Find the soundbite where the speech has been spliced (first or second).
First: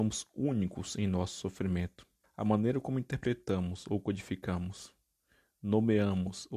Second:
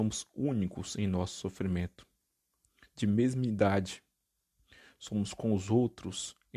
first